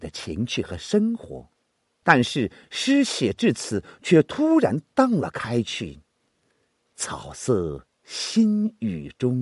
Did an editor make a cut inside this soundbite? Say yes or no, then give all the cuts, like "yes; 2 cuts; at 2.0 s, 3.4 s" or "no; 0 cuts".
yes; 1 cut; at 2.0 s